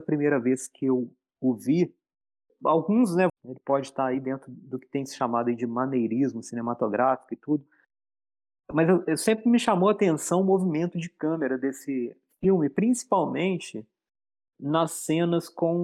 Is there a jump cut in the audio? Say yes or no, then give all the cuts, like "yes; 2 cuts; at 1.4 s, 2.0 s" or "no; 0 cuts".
yes; 1 cut; at 3.3 s